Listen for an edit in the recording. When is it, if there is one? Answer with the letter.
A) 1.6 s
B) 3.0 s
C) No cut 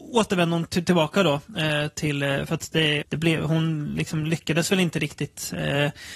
B